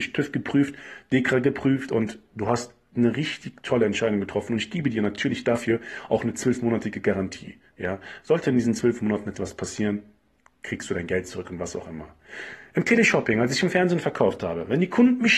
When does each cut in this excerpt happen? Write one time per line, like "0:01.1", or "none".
none